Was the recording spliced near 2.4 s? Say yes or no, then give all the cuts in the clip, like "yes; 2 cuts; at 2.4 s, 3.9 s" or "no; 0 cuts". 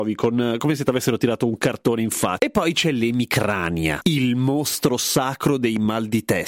yes; 1 cut; at 2.4 s